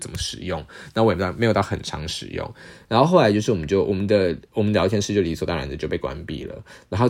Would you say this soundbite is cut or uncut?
uncut